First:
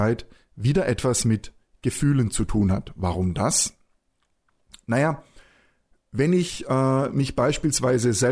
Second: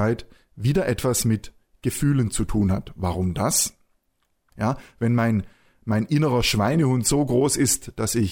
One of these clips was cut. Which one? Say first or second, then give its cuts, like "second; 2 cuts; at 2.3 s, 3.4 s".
second; 1 cut; at 4.5 s